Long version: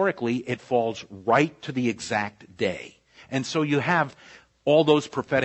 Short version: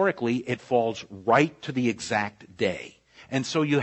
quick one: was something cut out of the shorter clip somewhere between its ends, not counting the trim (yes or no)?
no